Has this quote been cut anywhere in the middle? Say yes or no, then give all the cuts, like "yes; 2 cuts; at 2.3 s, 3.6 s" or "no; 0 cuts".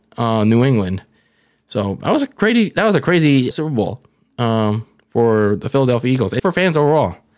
yes; 2 cuts; at 3.5 s, 6.4 s